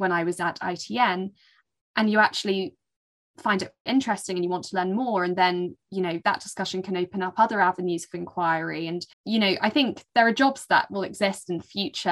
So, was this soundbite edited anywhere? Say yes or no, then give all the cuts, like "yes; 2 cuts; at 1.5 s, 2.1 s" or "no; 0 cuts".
yes; 2 cuts; at 3.9 s, 9.1 s